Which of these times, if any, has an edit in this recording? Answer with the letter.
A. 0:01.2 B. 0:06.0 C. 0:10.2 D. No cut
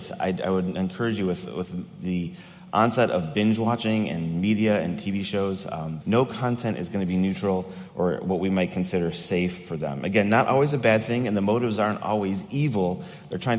B